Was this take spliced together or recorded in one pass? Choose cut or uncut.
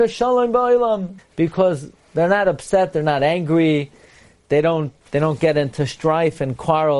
cut